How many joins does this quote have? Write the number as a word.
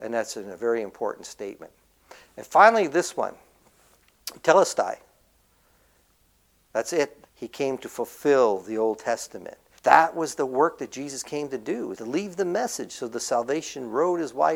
three